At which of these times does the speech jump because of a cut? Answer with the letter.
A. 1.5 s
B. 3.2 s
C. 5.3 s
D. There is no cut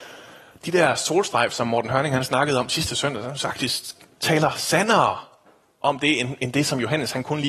D